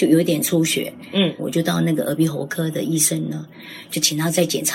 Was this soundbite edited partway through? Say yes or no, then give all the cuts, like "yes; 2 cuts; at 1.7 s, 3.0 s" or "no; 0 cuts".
yes; 1 cut; at 1.4 s